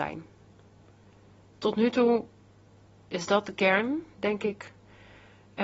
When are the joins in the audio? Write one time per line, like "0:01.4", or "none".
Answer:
none